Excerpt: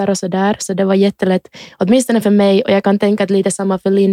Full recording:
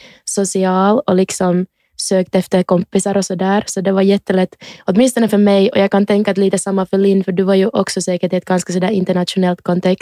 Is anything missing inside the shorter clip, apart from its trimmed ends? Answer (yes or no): no